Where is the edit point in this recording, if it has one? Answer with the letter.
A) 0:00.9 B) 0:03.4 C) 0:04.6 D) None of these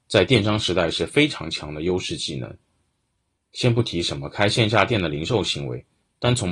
B